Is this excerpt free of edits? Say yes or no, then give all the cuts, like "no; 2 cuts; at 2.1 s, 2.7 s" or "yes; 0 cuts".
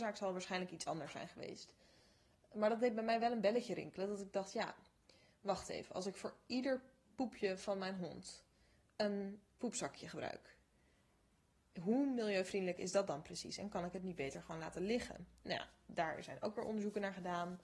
yes; 0 cuts